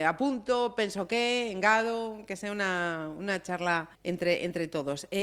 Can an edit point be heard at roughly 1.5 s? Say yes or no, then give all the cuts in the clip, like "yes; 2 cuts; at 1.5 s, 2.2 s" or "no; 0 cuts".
no; 1 cut; at 3.9 s